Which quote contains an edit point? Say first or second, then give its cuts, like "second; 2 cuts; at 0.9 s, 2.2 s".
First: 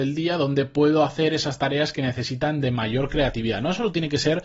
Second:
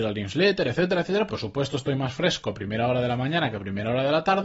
second; 1 cut; at 1.3 s